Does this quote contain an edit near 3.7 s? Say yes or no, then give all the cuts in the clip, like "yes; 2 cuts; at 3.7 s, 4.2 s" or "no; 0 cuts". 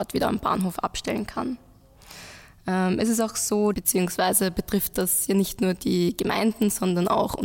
yes; 1 cut; at 3.7 s